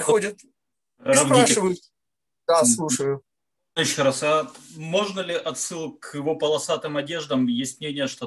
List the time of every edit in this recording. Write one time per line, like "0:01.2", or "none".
none